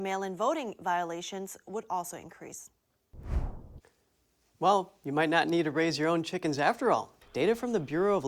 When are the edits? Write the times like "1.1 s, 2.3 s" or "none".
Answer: 7.2 s